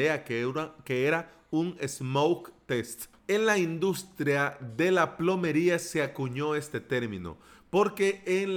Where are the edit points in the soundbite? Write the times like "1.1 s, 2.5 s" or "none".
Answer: 3.1 s